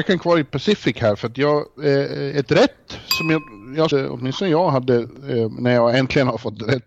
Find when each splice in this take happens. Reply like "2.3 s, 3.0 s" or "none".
3.9 s